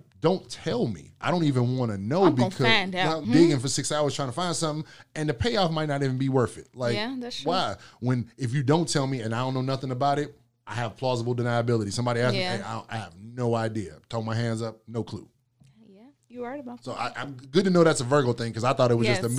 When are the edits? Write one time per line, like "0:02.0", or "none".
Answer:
0:03.3